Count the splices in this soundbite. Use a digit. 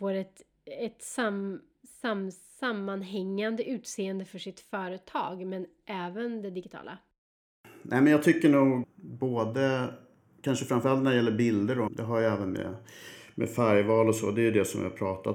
2